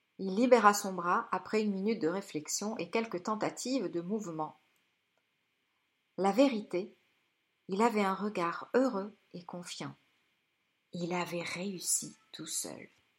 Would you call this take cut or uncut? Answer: uncut